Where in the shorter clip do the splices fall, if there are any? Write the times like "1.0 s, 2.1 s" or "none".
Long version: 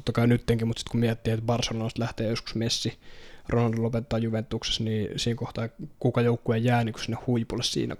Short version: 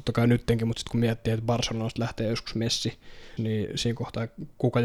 3.4 s